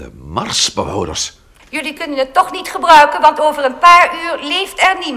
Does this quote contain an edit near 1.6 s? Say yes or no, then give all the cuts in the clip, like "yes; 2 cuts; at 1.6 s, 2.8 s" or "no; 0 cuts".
yes; 1 cut; at 1.6 s